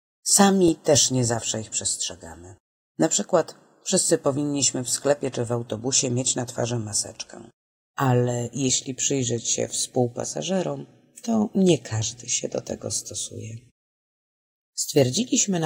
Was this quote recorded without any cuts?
yes; 0 cuts

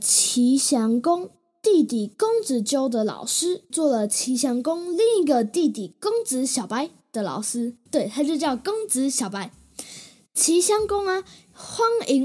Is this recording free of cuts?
no; 1 cut; at 3.7 s

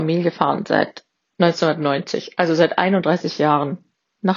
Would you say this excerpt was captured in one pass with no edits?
yes; 0 cuts

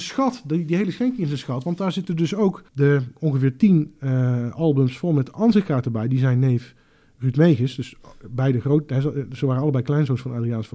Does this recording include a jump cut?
yes; 1 cut; at 2.7 s

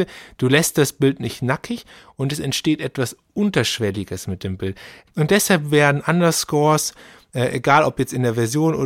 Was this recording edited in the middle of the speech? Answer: yes; 1 cut; at 5.1 s

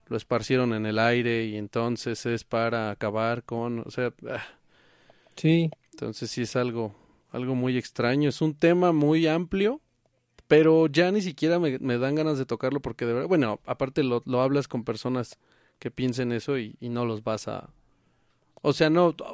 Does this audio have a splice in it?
no; 0 cuts

